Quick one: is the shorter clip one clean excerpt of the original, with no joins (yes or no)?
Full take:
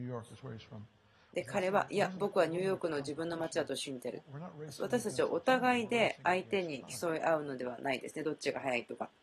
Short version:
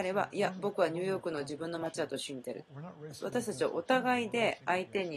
yes